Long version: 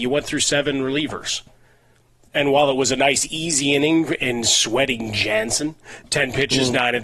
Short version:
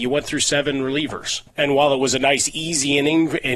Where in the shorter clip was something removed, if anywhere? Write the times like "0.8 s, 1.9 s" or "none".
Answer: 1.5 s